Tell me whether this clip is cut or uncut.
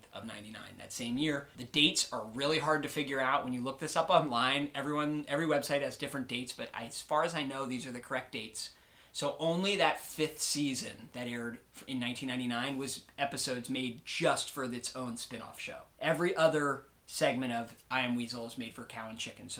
uncut